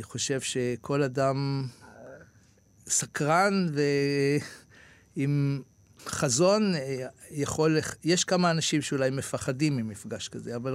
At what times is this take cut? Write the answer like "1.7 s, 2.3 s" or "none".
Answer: 6.0 s